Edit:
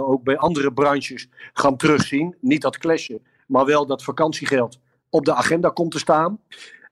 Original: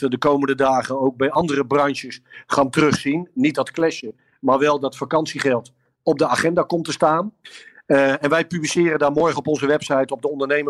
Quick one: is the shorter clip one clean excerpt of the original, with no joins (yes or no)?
yes